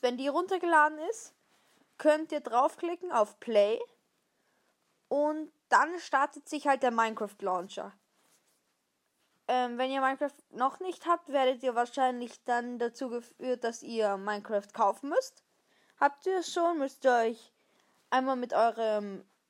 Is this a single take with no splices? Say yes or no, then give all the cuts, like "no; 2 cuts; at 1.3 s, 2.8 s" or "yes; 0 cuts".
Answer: yes; 0 cuts